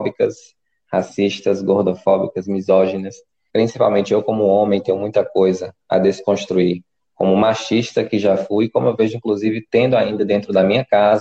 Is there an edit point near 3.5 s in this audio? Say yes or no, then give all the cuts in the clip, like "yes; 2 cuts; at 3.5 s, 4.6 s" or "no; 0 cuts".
yes; 1 cut; at 3.5 s